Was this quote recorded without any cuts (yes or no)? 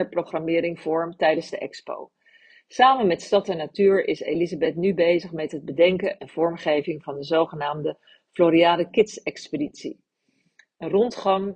yes